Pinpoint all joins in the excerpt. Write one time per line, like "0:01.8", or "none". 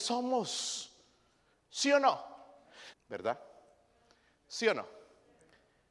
0:02.9